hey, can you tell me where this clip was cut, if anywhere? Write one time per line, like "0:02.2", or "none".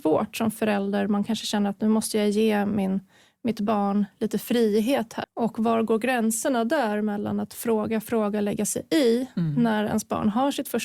0:05.2